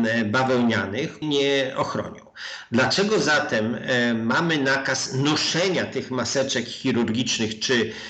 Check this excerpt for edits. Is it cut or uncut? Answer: cut